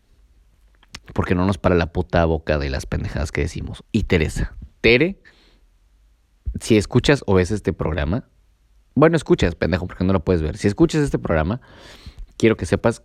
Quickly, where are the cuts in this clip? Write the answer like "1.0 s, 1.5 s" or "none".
1.0 s, 3.8 s